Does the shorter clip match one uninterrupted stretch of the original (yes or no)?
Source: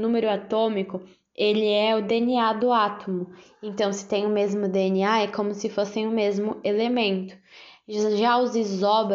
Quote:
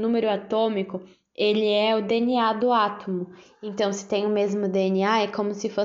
yes